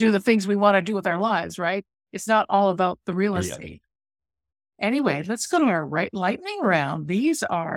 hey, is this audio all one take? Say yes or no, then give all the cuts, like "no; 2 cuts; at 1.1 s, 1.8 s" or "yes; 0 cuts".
yes; 0 cuts